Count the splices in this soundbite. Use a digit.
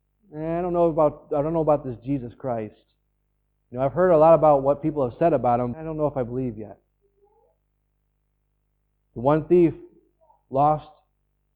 1